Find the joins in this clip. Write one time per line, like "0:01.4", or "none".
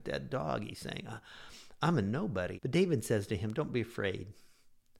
0:02.6

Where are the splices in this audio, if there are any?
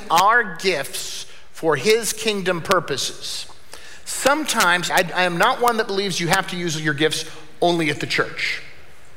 0:04.9

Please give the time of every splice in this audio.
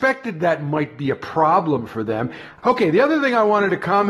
0:02.6

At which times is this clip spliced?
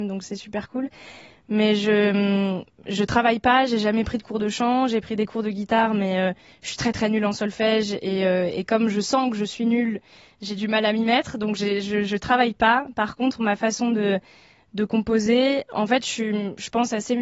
none

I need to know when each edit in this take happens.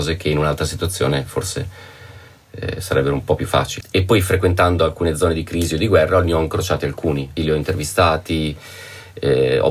0:03.8
0:07.4

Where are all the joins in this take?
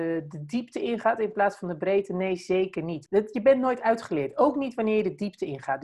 0:03.1

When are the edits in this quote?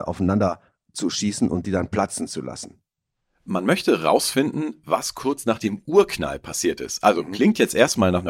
none

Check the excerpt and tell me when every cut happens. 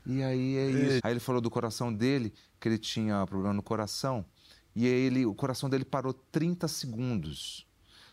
0:01.0

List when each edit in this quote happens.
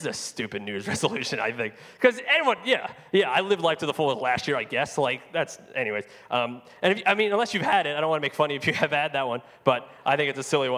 none

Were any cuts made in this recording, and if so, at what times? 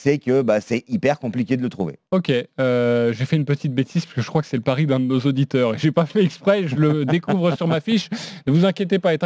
0:02.1

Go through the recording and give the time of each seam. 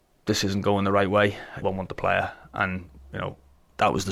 0:01.6

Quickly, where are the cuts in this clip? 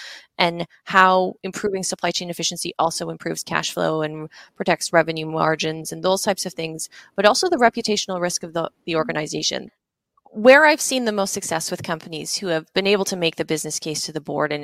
0:09.7

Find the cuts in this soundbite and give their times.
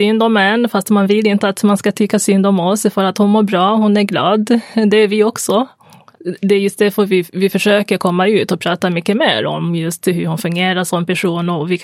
none

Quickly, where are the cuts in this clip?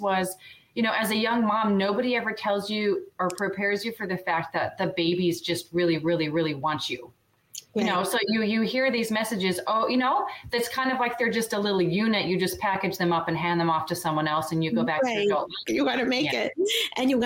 0:15.7

